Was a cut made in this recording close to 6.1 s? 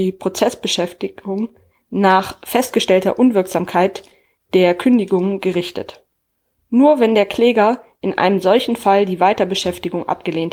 no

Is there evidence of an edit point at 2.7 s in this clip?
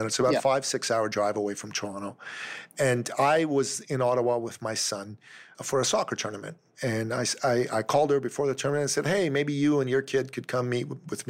no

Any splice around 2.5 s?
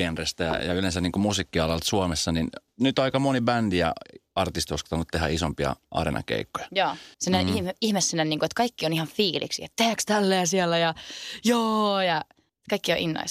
no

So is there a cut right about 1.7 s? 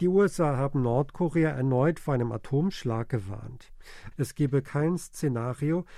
no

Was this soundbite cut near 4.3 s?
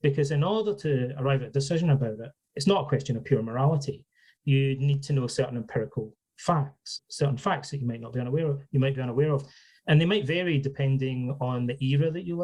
no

